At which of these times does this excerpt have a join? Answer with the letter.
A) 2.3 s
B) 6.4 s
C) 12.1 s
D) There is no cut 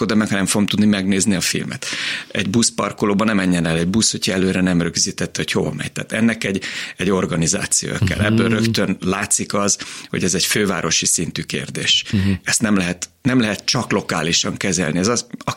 D